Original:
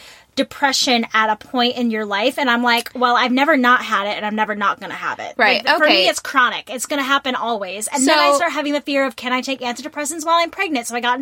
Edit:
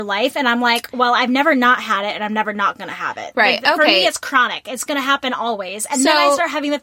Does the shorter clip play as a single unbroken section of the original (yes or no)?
yes